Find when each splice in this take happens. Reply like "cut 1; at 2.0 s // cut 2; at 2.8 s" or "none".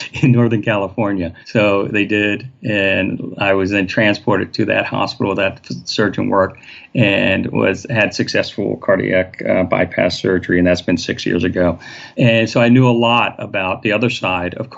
cut 1; at 1.4 s // cut 2; at 12.1 s